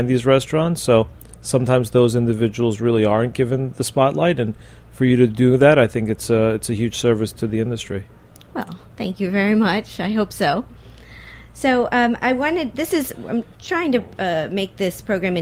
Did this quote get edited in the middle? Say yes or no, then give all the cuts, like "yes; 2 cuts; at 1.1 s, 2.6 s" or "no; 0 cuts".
no; 0 cuts